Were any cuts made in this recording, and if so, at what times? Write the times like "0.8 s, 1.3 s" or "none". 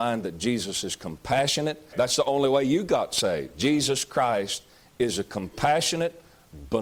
1.9 s